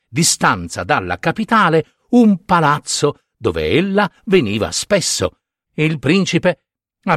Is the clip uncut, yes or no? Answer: no